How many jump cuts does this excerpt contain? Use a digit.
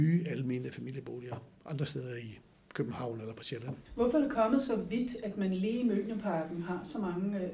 1